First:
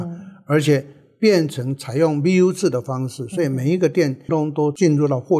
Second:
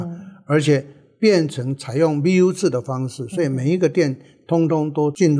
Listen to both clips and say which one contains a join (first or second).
first